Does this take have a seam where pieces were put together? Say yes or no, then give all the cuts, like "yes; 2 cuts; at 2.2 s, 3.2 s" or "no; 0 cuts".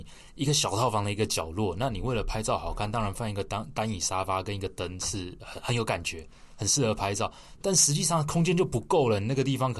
no; 0 cuts